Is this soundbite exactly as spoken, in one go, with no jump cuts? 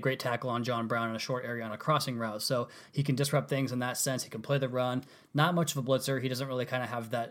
yes; 0 cuts

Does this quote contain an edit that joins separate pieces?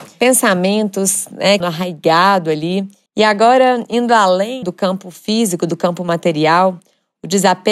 yes; 3 cuts; at 1.6 s, 3.1 s, 4.6 s

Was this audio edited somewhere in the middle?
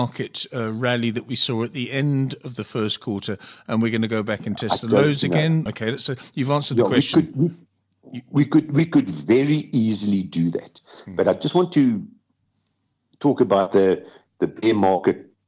yes; 1 cut; at 5.7 s

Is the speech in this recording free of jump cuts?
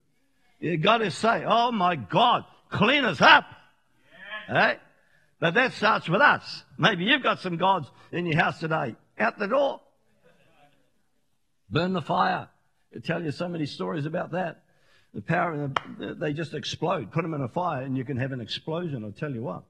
yes; 0 cuts

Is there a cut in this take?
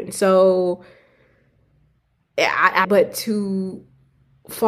yes; 1 cut; at 2.8 s

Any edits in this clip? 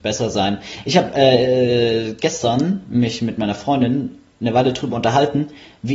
no; 0 cuts

